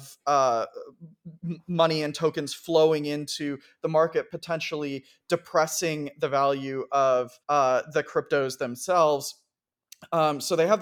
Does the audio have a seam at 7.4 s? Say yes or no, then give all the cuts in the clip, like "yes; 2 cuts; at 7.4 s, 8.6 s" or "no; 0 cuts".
yes; 1 cut; at 7.4 s